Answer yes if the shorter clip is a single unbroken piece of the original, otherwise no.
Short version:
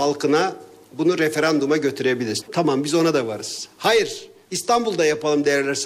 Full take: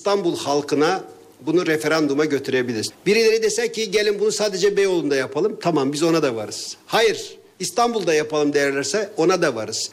no